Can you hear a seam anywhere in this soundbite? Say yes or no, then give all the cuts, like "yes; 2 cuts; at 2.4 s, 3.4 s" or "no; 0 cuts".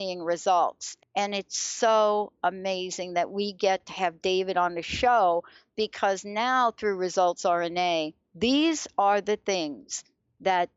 yes; 2 cuts; at 1.0 s, 8.3 s